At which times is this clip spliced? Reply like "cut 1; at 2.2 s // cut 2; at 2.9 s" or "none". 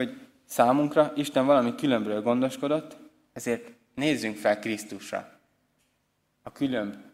none